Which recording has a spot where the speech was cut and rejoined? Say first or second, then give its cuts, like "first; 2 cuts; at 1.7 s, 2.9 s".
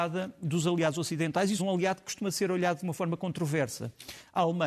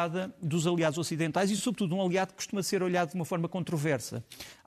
first; 1 cut; at 1.6 s